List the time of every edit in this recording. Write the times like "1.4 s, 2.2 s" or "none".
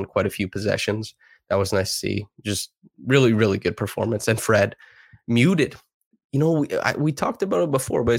none